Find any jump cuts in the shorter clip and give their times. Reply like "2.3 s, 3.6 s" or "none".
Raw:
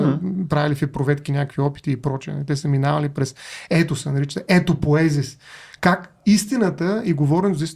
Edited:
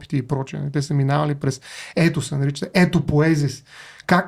none